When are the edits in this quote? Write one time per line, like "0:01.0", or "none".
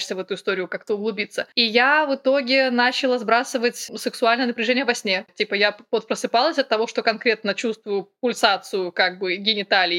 0:05.3

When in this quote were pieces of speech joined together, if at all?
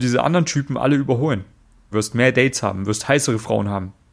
0:01.9

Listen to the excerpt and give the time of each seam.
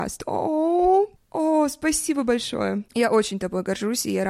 0:01.2

